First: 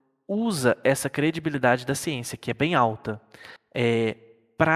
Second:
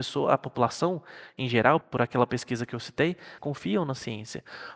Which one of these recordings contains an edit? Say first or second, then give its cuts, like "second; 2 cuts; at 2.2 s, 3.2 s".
second; 2 cuts; at 1.8 s, 3.4 s